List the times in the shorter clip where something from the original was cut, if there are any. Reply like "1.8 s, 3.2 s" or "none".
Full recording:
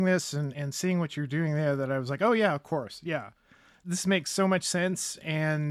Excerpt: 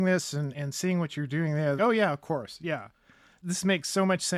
1.8 s